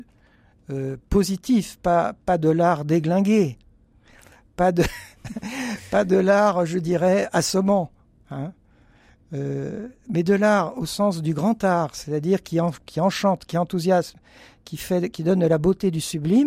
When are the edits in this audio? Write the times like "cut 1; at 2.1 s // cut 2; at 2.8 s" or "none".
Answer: none